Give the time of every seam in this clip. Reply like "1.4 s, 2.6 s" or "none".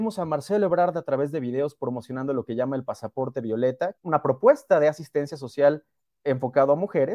3.9 s